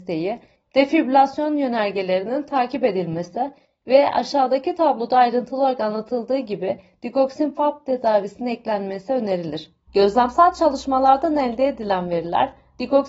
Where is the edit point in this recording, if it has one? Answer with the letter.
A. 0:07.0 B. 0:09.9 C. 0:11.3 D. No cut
B